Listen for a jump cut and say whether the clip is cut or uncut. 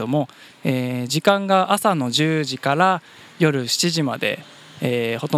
uncut